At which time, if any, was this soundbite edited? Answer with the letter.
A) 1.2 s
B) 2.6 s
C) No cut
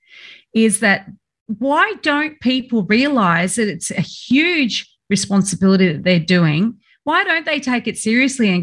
C